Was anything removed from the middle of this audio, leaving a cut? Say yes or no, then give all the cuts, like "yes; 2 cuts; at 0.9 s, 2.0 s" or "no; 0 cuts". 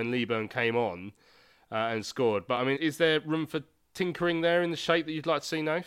yes; 1 cut; at 2.8 s